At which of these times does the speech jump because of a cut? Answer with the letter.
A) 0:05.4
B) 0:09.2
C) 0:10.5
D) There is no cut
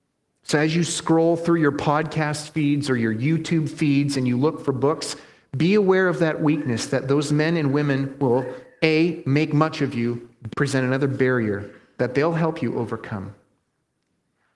C